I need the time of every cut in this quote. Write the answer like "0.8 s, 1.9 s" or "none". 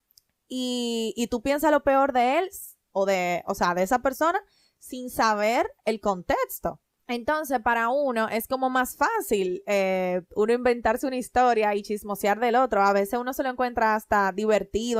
none